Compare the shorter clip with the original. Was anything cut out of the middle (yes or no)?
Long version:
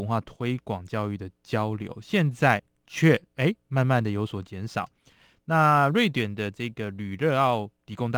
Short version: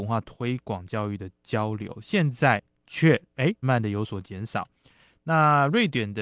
yes